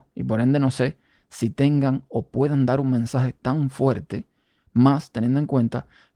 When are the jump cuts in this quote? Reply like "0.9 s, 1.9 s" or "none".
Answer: none